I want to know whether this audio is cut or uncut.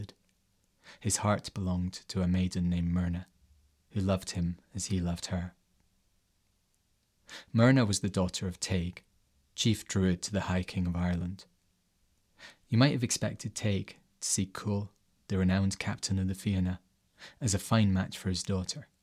uncut